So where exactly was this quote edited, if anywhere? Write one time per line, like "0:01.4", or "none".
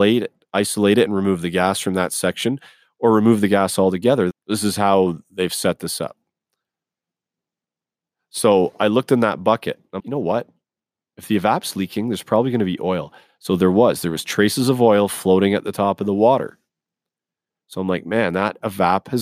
0:04.3
0:10.0